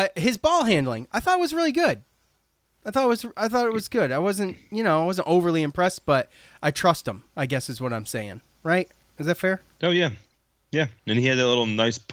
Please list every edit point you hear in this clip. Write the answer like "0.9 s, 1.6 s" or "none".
none